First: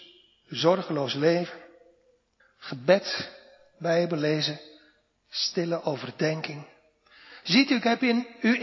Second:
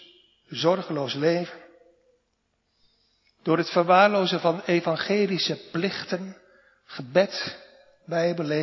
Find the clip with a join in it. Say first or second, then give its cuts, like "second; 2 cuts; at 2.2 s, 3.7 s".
first; 2 cuts; at 2.4 s, 7.4 s